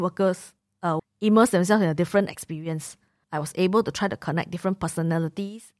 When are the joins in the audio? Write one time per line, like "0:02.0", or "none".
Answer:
0:01.0
0:03.2